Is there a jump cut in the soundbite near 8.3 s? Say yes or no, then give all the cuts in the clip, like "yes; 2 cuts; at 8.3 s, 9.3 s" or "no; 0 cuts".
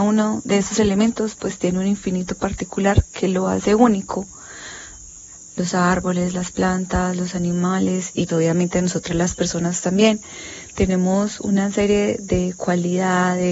yes; 1 cut; at 8.3 s